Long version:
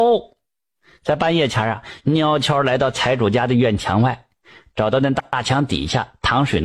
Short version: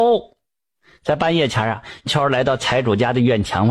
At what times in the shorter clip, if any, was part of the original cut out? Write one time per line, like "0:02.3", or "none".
0:02.1